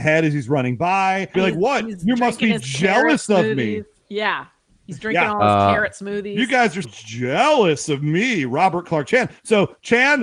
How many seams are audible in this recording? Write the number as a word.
two